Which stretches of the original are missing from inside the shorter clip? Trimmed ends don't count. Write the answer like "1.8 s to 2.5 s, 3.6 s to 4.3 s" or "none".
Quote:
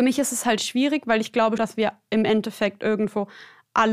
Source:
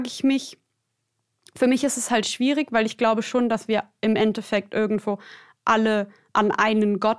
3.2 s to 3.5 s